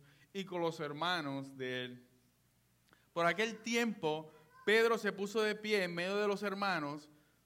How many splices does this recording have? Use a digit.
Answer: 0